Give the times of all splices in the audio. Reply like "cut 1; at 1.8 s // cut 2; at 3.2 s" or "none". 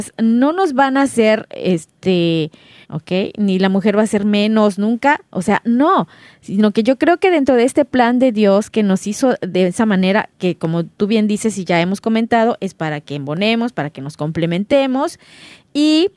cut 1; at 2.8 s